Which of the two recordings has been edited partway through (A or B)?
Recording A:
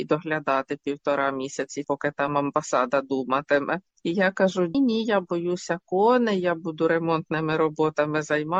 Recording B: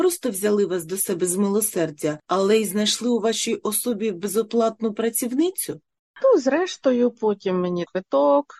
A